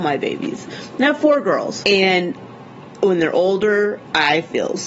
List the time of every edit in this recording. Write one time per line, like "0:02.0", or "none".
0:01.8